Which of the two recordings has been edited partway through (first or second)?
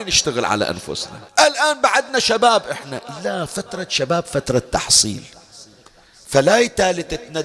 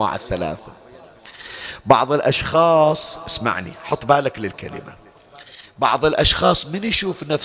first